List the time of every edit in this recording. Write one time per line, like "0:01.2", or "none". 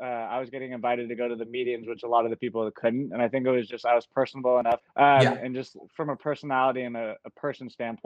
0:04.8